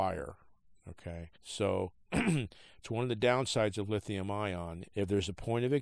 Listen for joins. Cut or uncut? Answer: cut